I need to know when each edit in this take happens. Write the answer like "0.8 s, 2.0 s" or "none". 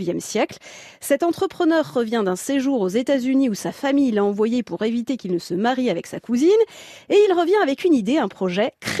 none